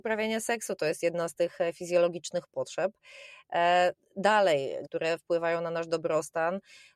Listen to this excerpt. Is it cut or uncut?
cut